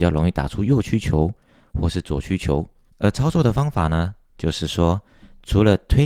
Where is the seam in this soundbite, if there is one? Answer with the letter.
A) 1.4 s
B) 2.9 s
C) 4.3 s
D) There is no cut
B